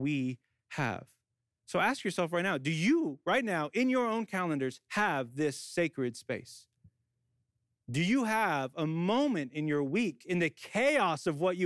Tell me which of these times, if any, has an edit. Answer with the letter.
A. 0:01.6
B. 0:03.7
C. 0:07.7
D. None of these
D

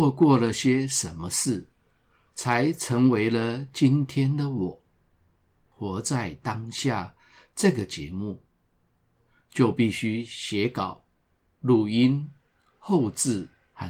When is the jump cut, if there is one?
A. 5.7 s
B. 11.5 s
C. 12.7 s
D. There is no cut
A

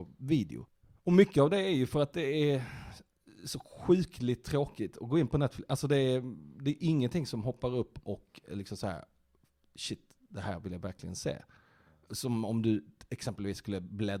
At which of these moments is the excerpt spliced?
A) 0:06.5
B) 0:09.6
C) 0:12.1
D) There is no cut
D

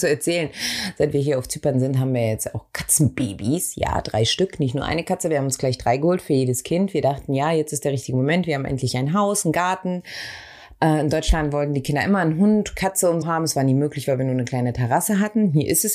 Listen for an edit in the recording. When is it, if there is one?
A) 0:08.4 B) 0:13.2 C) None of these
B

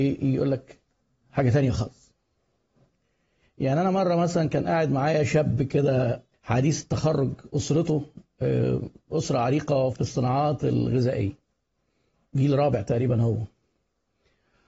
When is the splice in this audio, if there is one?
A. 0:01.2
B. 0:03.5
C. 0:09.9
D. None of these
C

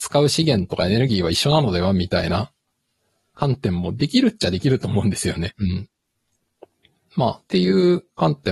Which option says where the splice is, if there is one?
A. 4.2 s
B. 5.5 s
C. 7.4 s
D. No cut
B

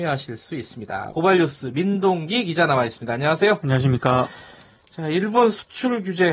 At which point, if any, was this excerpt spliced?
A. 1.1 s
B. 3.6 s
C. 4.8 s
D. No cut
A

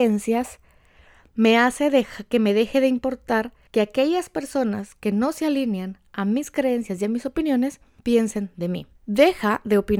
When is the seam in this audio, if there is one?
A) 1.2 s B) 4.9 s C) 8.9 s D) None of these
C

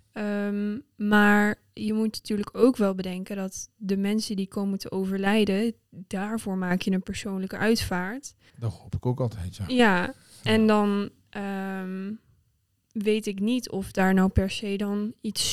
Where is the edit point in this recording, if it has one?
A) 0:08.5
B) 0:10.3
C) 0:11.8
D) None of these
A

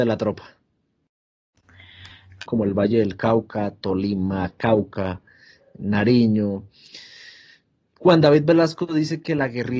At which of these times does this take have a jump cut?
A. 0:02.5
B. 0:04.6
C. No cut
A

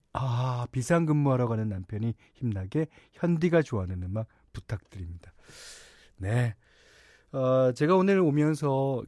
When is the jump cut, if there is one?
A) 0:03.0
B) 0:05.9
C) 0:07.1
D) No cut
D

